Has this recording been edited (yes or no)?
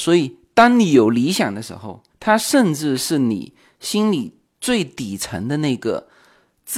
yes